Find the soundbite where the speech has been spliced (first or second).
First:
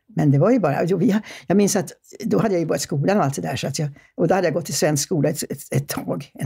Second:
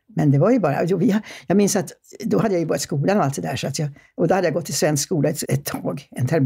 second